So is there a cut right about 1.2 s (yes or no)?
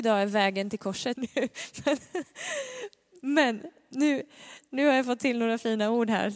yes